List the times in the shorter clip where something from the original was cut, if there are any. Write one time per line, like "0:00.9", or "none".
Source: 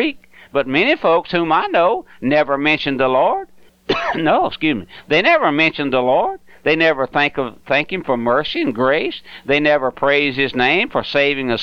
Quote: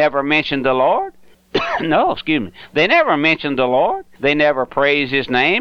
0:04.2